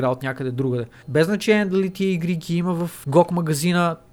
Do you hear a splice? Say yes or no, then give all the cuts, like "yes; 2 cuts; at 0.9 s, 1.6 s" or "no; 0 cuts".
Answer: yes; 2 cuts; at 1.0 s, 3.0 s